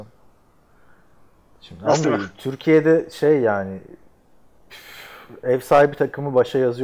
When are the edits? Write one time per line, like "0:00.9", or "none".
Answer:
0:02.0